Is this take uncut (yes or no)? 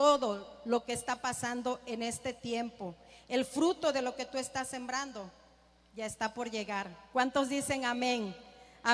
yes